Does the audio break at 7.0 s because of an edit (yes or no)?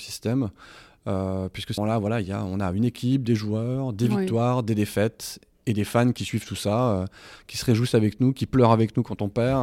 no